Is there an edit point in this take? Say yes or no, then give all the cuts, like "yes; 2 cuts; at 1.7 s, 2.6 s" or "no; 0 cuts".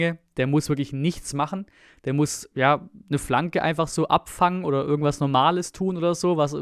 no; 0 cuts